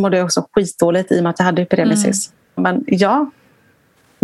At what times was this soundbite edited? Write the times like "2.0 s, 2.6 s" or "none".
2.6 s